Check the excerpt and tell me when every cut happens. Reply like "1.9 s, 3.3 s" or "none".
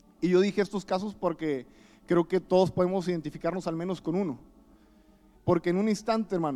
5.3 s